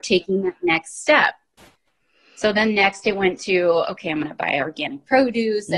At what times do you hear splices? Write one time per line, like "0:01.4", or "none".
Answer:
none